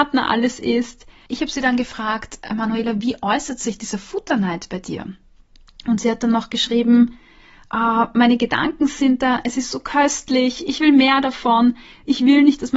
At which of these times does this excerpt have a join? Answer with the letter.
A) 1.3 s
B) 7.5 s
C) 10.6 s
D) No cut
A